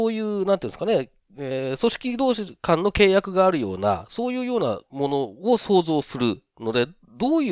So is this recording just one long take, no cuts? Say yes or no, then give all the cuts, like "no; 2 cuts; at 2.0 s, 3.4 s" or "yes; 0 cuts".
yes; 0 cuts